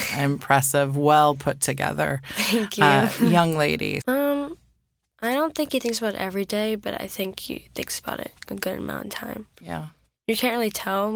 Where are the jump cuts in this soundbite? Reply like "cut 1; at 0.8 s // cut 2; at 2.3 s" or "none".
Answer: cut 1; at 4.0 s